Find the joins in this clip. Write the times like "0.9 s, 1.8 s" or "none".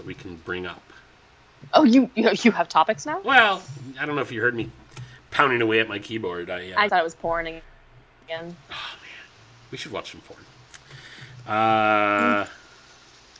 6.9 s